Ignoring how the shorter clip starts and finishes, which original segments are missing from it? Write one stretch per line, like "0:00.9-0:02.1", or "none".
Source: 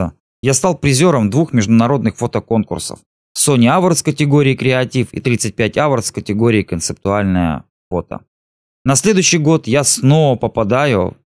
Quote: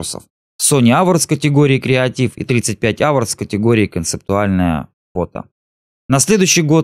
none

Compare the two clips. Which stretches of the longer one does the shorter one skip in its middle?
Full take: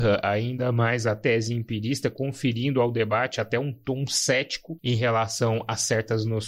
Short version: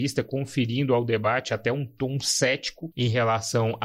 none

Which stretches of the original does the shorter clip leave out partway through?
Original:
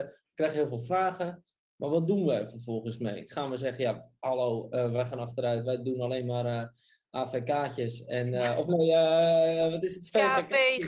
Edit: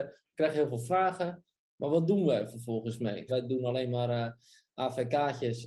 0:03.3-0:05.6

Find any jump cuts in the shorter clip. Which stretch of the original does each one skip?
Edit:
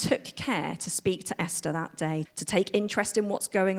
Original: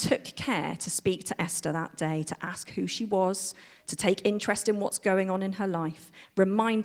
0:02.2-0:03.8

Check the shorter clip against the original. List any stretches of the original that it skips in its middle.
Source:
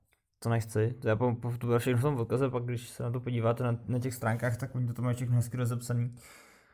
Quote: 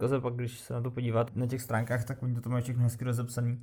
0:03.6-0:03.8

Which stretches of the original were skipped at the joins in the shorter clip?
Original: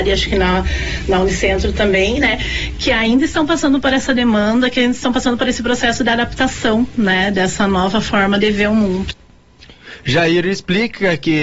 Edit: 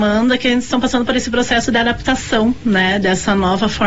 none

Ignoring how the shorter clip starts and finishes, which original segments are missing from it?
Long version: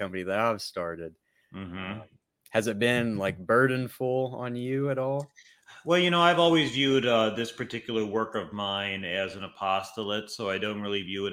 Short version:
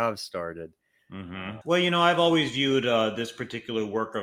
0:02.0-0:05.8

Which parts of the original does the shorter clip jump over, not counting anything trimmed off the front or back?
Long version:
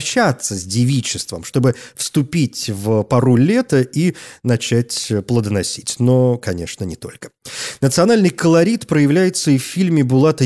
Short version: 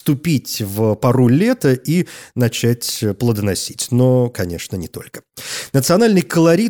none

